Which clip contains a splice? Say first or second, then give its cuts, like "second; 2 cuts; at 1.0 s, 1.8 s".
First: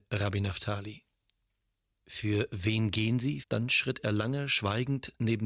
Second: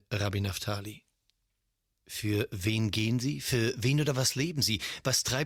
first; 1 cut; at 3.4 s